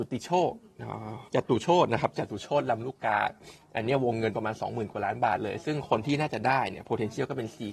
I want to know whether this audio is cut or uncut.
cut